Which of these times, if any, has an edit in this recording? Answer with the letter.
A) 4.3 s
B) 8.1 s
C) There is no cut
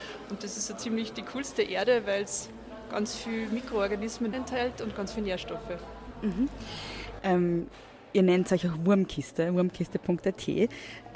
A